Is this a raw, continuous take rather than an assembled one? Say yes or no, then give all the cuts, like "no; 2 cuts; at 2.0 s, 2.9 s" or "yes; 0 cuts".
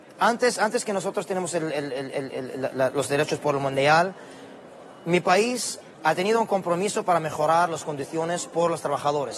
no; 1 cut; at 5.9 s